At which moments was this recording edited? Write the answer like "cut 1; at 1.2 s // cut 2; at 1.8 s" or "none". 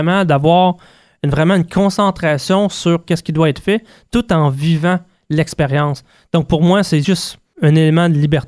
none